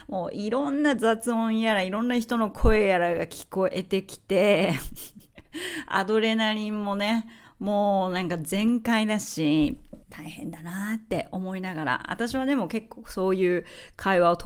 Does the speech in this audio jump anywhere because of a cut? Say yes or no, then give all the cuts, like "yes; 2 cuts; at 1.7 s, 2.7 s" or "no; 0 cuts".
yes; 1 cut; at 10.0 s